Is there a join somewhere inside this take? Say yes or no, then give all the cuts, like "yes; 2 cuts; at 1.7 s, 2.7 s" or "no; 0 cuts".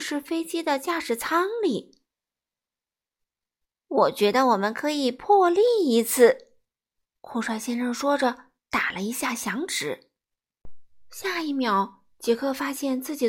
yes; 1 cut; at 3.2 s